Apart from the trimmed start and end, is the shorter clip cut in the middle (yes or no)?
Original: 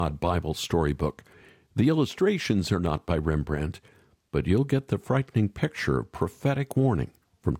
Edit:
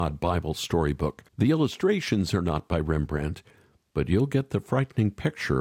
yes